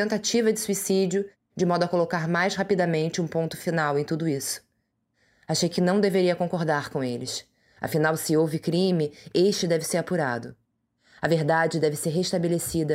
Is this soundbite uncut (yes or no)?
yes